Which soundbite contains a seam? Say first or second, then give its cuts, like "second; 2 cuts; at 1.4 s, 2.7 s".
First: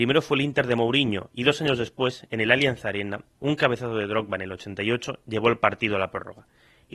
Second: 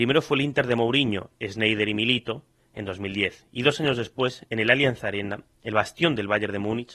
first; 2 cuts; at 1.3 s, 3.3 s